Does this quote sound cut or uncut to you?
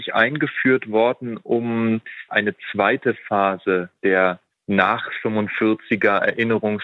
cut